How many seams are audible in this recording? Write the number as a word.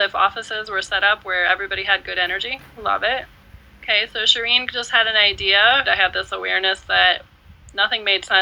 two